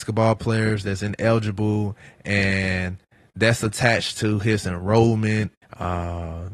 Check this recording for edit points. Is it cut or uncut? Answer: cut